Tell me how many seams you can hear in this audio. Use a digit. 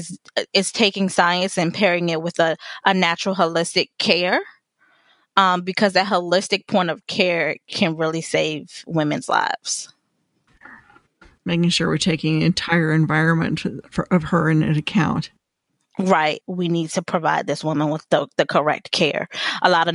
1